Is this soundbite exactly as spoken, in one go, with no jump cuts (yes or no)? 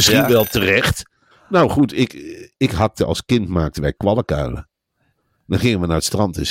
no